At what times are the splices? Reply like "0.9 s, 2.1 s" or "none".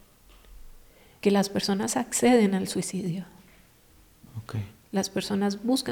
1.2 s